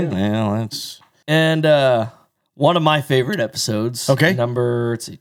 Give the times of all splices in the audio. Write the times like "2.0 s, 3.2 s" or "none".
1.2 s